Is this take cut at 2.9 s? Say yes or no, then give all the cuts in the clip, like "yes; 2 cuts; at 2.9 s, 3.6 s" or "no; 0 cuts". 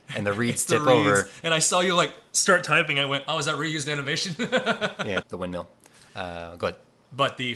no; 1 cut; at 5.2 s